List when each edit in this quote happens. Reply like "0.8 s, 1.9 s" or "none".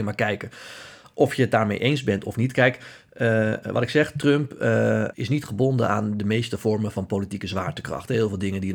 5.1 s